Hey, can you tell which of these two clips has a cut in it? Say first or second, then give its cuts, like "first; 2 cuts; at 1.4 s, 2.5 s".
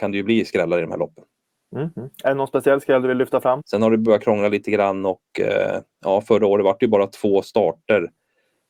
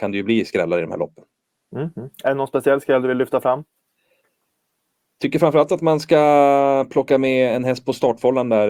first; 1 cut; at 3.6 s